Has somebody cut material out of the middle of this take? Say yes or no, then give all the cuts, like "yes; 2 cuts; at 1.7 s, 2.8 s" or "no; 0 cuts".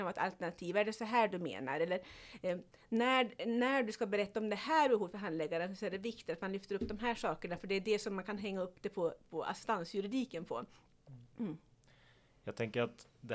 no; 0 cuts